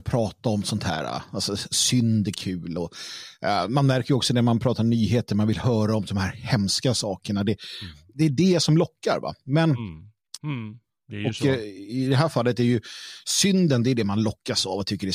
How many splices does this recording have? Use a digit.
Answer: 1